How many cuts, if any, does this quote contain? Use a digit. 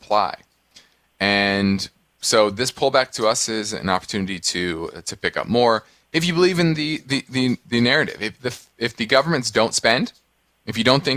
1